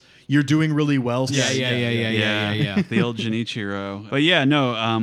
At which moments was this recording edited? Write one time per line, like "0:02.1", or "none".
0:01.3
0:04.1